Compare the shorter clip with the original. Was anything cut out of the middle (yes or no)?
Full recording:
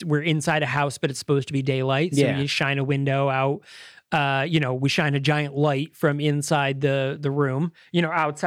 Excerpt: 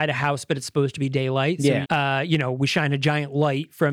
yes